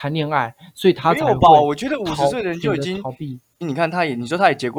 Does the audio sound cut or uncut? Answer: cut